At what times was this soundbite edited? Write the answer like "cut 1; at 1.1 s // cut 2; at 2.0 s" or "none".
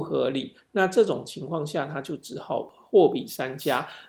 none